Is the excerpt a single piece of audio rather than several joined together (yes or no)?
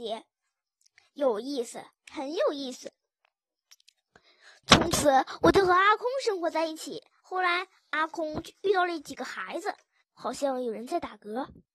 no